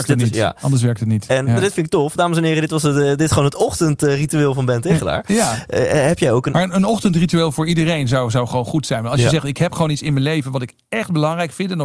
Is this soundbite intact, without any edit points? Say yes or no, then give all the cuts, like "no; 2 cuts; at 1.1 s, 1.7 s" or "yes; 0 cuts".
yes; 0 cuts